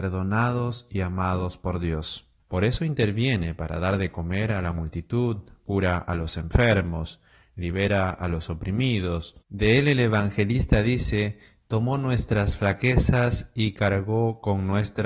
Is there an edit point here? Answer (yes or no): yes